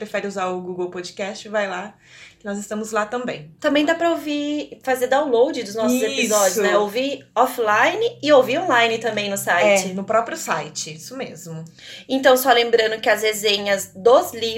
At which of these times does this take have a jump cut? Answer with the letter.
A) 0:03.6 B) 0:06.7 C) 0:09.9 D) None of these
A